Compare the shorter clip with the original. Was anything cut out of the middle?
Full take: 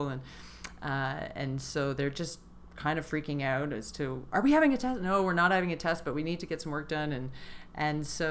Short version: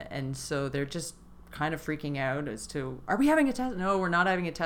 no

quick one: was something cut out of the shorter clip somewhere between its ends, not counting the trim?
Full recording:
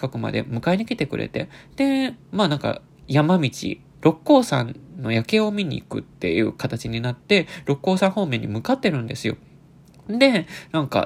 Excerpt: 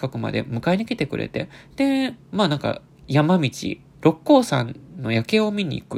no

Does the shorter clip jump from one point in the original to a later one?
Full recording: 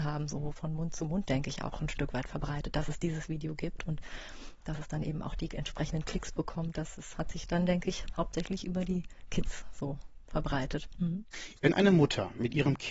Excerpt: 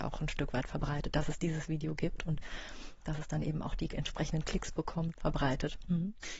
yes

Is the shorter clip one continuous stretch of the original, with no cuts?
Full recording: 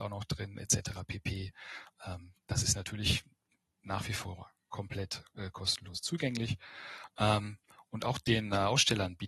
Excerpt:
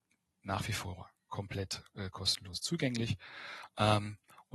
yes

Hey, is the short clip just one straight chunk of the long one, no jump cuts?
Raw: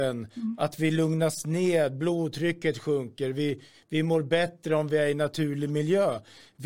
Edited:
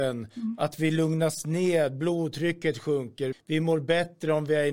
no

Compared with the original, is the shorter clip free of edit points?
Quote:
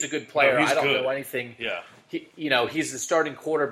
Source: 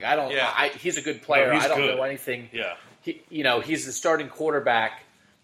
yes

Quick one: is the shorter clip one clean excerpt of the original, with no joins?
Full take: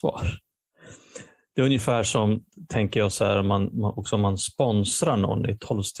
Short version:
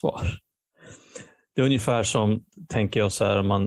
yes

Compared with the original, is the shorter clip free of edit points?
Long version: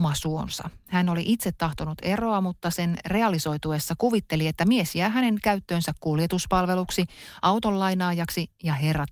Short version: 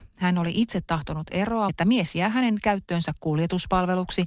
no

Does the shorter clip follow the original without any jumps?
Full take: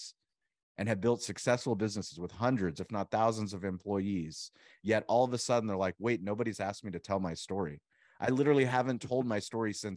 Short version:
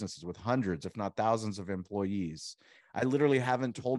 no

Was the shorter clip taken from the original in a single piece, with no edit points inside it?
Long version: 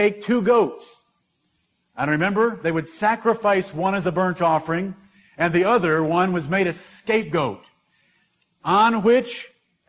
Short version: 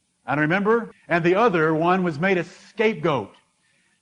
no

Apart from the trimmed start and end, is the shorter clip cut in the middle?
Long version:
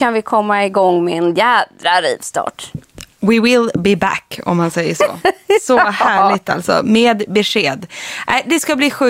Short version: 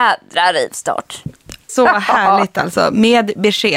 yes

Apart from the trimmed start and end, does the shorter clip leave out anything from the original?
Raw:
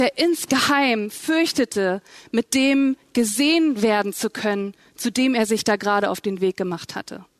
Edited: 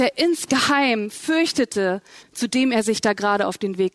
yes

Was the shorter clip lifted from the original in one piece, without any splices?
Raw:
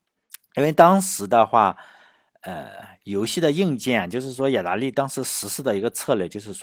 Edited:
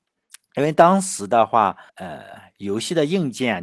no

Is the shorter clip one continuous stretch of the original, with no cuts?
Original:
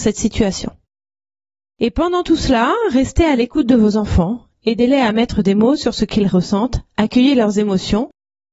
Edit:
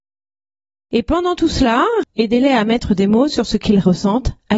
no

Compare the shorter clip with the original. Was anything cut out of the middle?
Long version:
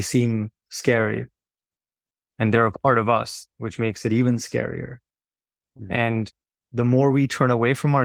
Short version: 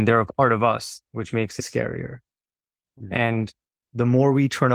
yes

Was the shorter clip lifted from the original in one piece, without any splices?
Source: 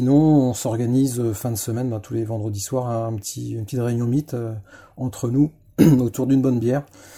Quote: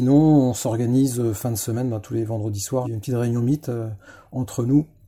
no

